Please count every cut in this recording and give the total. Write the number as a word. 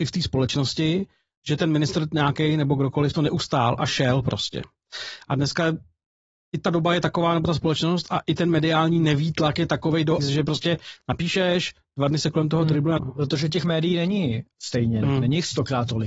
three